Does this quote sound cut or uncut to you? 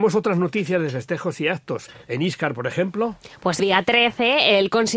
cut